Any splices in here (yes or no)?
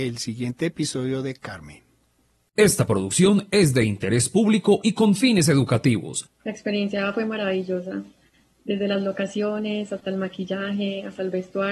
yes